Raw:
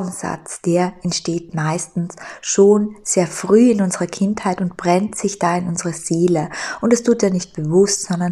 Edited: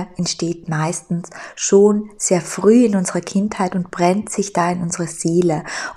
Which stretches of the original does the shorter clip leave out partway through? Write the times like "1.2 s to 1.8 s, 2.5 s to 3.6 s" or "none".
none